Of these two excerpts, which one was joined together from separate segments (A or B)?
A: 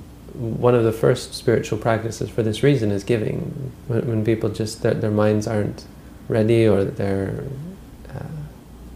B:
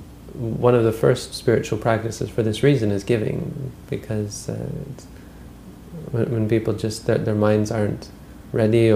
A